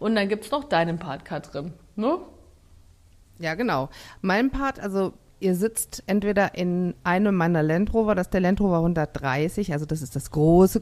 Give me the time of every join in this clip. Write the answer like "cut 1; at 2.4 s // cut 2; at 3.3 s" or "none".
none

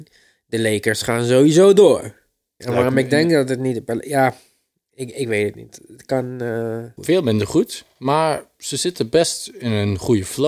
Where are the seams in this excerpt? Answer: cut 1; at 2.6 s // cut 2; at 7.0 s

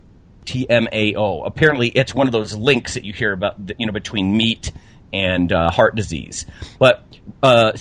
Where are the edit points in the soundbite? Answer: cut 1; at 6.8 s

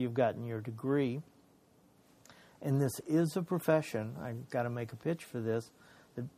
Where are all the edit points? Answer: none

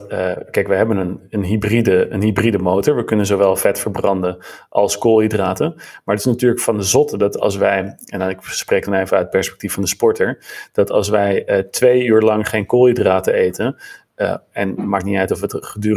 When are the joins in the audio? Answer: none

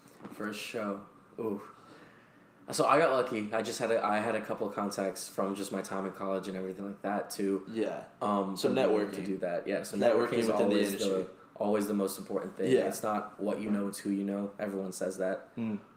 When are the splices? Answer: none

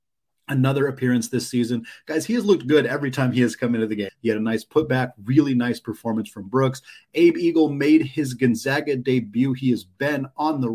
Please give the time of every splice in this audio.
cut 1; at 4.1 s

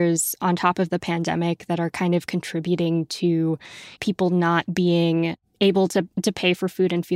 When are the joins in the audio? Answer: cut 1; at 4.0 s

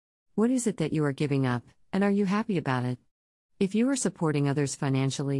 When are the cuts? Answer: none

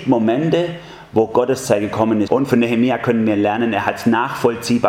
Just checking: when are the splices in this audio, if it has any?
cut 1; at 2.3 s

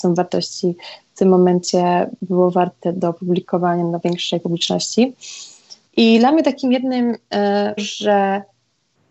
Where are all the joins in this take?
cut 1; at 5.9 s // cut 2; at 7.8 s

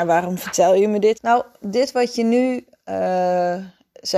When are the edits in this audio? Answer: cut 1; at 1.1 s

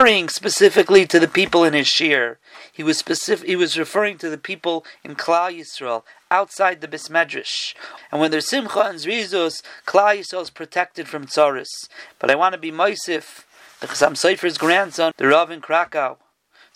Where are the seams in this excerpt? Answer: cut 1; at 8.0 s // cut 2; at 12.1 s // cut 3; at 15.1 s

